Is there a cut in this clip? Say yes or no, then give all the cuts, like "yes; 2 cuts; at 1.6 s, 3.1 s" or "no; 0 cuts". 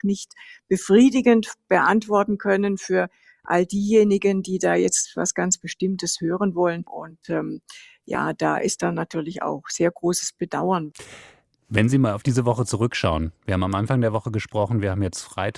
no; 0 cuts